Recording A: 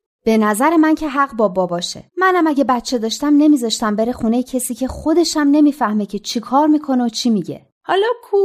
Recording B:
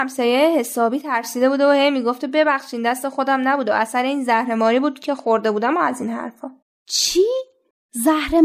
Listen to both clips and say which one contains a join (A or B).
A